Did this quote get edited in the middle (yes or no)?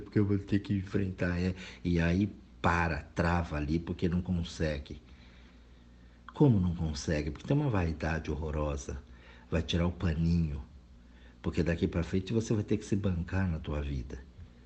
no